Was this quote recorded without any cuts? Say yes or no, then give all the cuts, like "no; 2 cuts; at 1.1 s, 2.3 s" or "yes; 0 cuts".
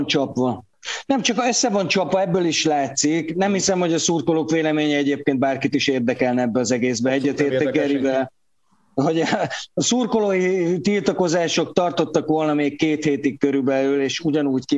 yes; 0 cuts